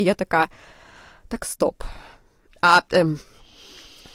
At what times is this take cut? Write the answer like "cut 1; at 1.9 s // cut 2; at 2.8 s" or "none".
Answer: none